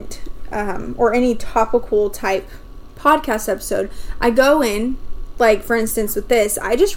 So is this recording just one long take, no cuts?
yes; 0 cuts

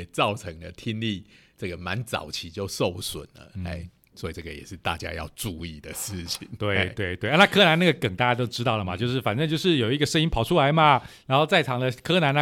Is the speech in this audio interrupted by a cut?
no; 0 cuts

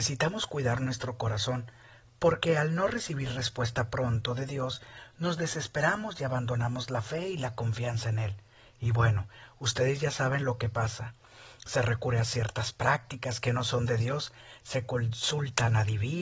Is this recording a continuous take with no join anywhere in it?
yes; 0 cuts

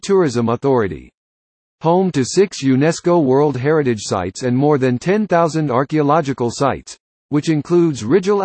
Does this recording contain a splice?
yes; 2 cuts; at 1.7 s, 7.1 s

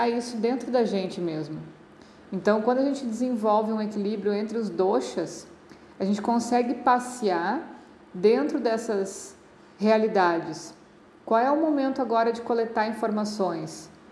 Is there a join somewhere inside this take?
no; 0 cuts

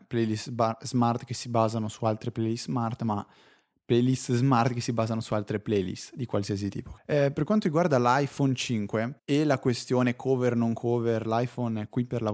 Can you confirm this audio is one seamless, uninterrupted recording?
no; 2 cuts; at 7.0 s, 9.2 s

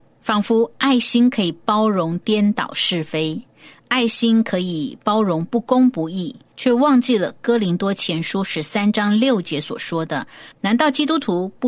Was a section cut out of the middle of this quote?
yes; 2 cuts; at 6.5 s, 10.5 s

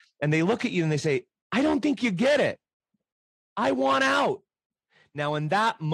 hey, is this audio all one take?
yes; 0 cuts

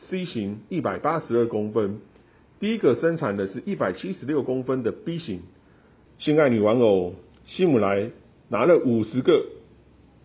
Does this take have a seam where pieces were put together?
yes; 2 cuts; at 6.1 s, 7.3 s

